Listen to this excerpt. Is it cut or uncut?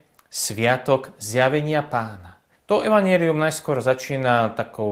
cut